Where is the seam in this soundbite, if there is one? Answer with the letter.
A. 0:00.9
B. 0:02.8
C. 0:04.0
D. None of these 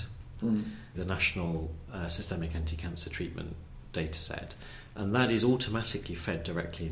A